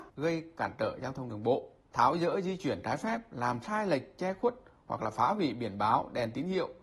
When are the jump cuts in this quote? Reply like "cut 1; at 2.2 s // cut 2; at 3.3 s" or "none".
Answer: none